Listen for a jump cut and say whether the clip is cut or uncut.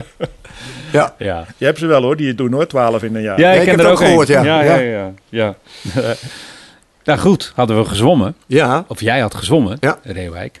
uncut